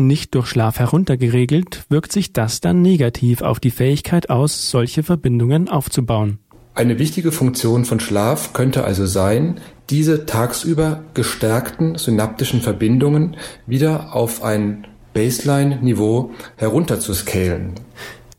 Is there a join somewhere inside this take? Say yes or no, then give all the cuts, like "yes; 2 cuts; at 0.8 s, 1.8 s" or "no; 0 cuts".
no; 0 cuts